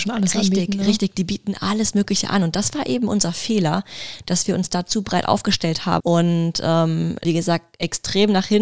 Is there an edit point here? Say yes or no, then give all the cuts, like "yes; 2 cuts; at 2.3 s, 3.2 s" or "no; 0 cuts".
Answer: yes; 2 cuts; at 6.0 s, 7.2 s